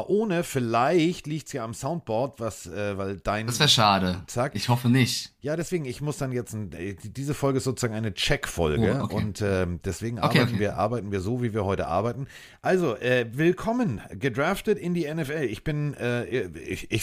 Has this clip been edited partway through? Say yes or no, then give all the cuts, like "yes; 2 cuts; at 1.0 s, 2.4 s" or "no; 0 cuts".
no; 0 cuts